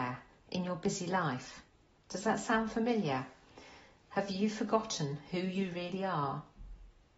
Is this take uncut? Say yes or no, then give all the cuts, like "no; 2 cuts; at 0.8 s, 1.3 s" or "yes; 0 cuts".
no; 1 cut; at 2.0 s